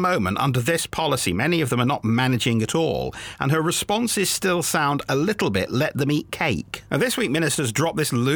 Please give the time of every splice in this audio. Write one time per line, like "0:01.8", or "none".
0:06.9